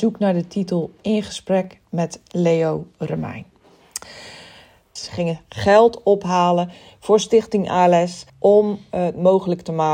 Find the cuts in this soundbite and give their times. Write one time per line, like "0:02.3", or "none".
0:05.0
0:08.3